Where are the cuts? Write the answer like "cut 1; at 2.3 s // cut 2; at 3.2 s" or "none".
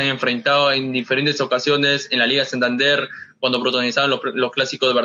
none